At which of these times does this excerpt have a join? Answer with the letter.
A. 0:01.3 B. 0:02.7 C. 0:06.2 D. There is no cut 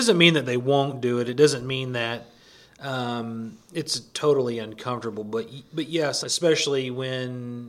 C